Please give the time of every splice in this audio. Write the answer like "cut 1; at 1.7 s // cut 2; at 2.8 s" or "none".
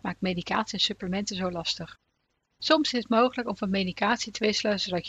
none